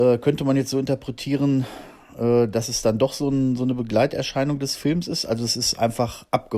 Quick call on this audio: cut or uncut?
uncut